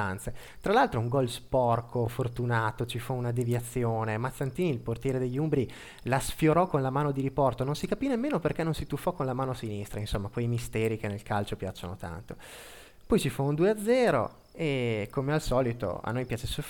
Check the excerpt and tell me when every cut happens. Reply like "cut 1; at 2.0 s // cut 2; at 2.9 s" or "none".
none